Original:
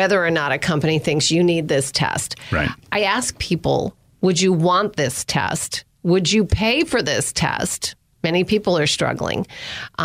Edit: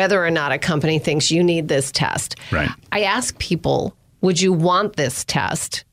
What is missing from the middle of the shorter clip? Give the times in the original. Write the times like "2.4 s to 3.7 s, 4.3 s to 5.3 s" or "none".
none